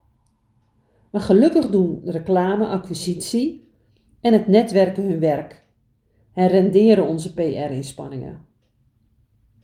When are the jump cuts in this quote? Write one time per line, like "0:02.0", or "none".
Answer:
none